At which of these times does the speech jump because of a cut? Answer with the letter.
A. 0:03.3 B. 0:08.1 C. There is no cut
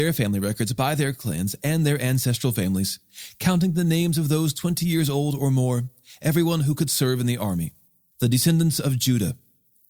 B